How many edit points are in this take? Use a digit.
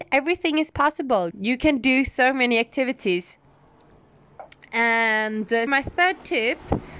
2